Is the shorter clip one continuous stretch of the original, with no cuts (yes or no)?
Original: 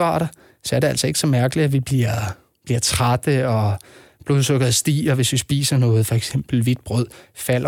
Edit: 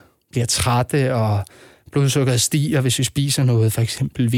yes